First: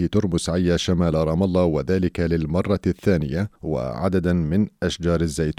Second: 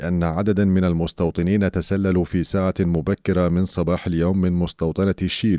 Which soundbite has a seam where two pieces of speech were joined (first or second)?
first